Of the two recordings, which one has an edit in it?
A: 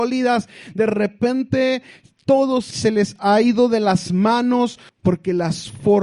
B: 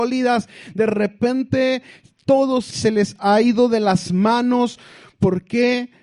A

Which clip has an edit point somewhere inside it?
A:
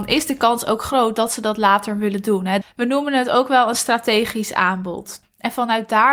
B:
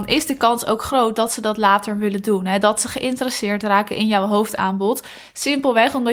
A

